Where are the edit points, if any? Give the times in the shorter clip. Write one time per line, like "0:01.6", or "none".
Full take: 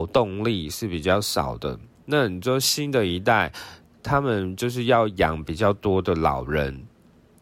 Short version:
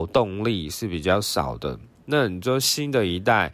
none